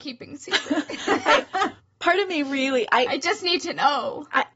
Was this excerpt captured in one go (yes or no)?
yes